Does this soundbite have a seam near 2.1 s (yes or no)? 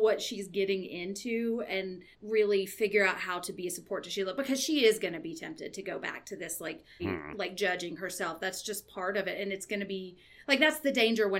yes